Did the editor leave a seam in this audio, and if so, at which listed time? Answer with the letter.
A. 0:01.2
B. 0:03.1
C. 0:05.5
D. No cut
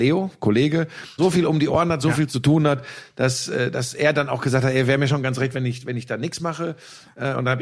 A